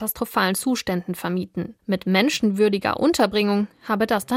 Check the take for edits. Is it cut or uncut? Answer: cut